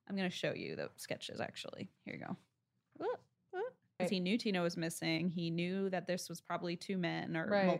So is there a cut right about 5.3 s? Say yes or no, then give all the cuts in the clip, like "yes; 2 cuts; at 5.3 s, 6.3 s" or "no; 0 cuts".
no; 2 cuts; at 2.0 s, 4.0 s